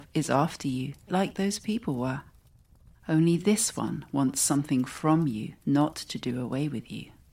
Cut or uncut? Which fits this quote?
cut